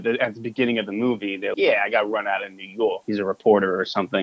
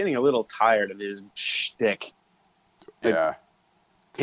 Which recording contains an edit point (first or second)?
first